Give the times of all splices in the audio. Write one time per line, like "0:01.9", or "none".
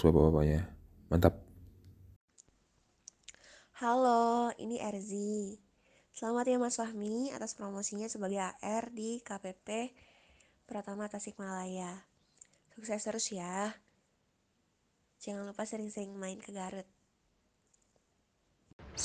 none